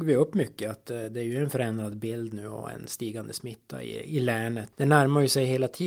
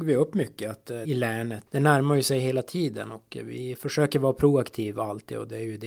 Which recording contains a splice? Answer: second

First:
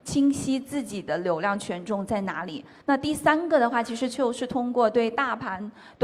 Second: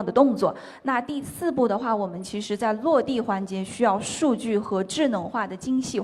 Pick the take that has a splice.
first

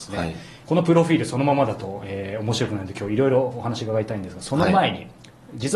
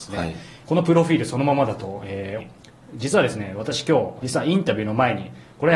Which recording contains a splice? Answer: second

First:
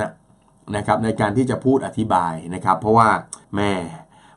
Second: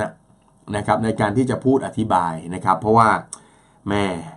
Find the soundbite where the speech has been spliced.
first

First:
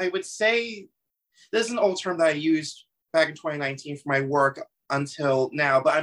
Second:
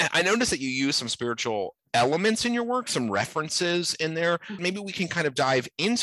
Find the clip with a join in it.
second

